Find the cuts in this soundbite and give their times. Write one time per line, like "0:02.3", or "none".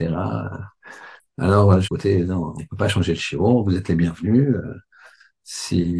0:01.8